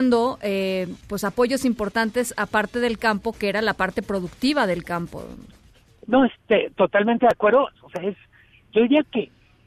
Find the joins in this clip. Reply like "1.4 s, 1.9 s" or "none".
7.7 s

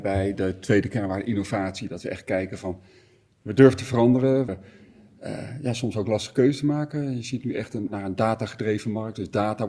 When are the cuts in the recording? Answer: 4.5 s, 7.9 s

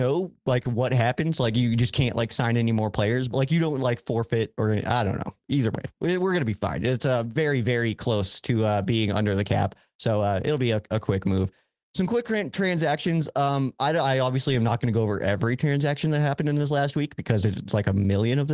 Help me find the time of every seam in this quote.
3.3 s

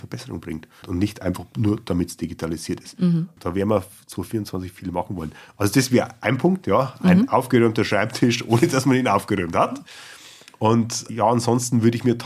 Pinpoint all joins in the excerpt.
none

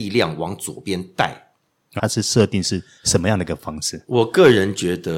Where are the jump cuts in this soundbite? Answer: 2.0 s

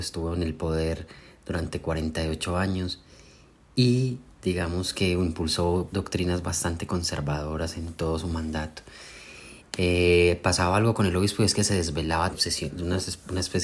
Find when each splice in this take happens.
9.6 s, 12.3 s

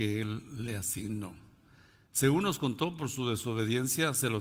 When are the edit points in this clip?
none

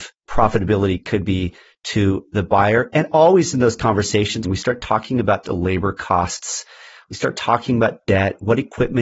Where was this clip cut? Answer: 4.4 s

